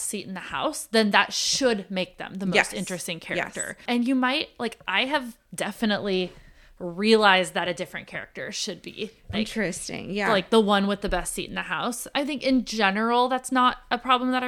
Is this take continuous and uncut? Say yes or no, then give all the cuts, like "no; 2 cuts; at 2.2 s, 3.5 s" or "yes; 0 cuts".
no; 2 cuts; at 9.3 s, 12.1 s